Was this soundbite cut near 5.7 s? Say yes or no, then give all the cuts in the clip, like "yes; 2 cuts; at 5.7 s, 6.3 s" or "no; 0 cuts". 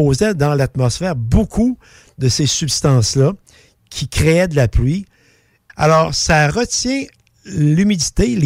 yes; 1 cut; at 5.7 s